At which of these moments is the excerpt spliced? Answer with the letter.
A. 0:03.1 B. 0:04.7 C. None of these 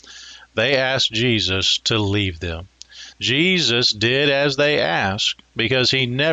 A